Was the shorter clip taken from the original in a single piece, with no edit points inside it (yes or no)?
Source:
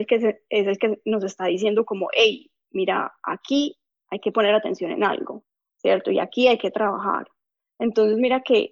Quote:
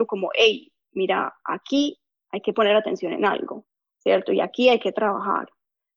yes